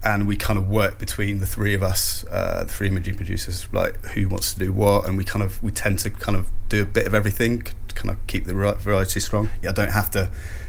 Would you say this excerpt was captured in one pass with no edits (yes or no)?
no